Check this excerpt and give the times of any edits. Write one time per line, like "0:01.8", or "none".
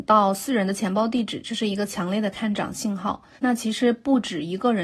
0:03.4